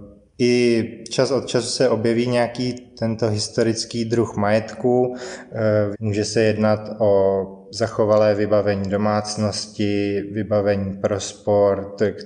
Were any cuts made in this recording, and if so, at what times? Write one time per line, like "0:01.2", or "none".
0:05.9

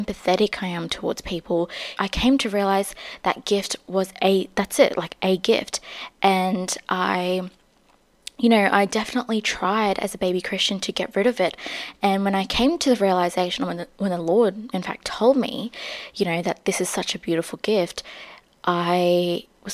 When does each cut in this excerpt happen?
0:02.0

